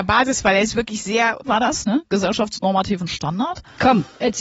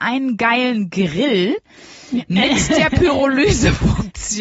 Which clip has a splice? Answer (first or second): first